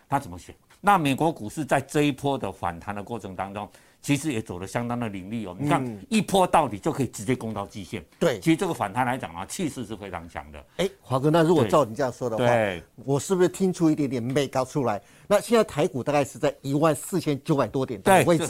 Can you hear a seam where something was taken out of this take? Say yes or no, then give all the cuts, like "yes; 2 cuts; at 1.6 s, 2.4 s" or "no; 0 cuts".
no; 0 cuts